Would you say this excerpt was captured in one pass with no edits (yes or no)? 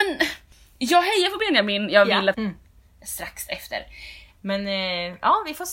no